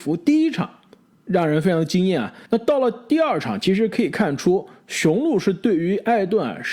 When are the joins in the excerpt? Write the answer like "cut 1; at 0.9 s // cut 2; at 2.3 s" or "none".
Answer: cut 1; at 2.5 s